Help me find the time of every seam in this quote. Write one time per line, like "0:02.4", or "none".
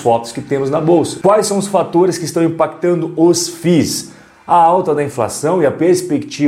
none